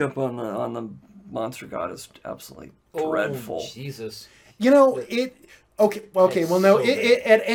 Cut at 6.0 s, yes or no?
no